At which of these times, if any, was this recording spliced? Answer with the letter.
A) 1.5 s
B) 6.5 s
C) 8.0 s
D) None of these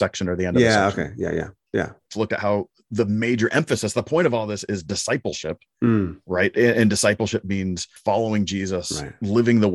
C